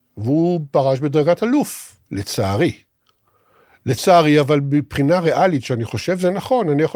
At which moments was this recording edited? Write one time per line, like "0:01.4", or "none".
0:02.0